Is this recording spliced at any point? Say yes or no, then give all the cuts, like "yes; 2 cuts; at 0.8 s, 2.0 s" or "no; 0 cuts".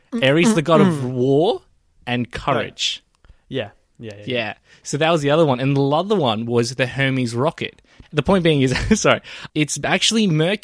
yes; 2 cuts; at 8.0 s, 9.5 s